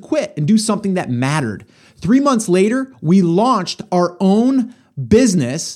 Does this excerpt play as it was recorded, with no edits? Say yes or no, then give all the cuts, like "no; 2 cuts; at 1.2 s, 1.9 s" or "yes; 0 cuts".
yes; 0 cuts